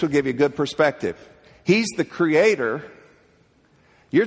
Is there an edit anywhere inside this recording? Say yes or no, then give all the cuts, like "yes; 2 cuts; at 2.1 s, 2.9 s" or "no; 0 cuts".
no; 0 cuts